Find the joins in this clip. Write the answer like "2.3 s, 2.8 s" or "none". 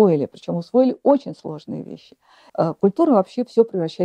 2.5 s